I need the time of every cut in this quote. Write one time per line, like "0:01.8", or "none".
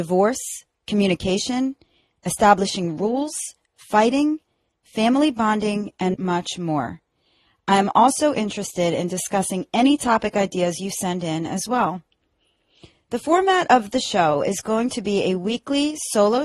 0:06.1

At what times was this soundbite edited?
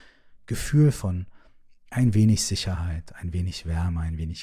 none

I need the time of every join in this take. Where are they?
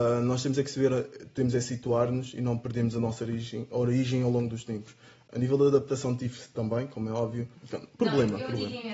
0:07.5

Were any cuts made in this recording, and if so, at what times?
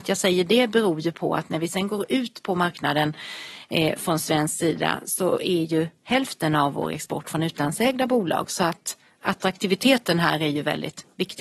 none

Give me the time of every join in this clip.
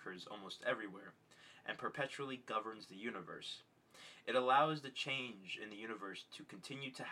none

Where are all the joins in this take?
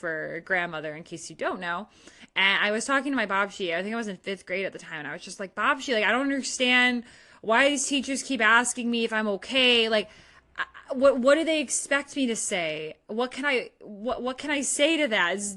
none

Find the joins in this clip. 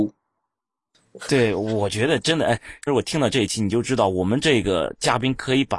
0:01.2
0:02.9

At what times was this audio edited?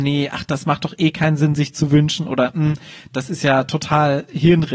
none

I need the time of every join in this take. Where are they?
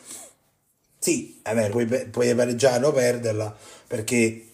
0:01.7

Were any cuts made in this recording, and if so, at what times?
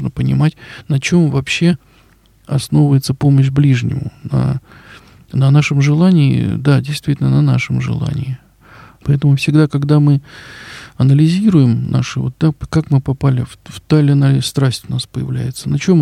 0:09.0

